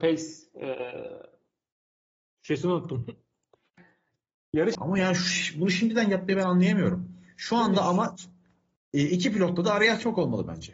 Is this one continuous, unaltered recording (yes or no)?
no